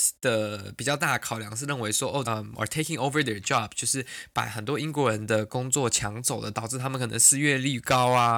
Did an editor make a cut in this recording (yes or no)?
yes